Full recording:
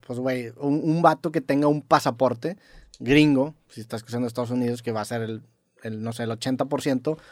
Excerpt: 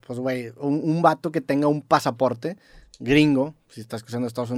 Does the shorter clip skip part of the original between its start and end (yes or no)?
no